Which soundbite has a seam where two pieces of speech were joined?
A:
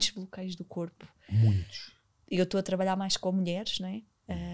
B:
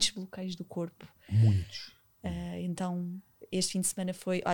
B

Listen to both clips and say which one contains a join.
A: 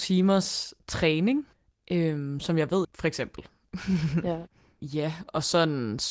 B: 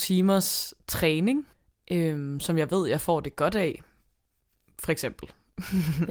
A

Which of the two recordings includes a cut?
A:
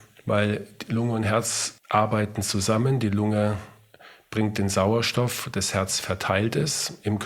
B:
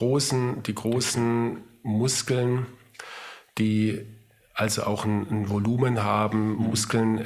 A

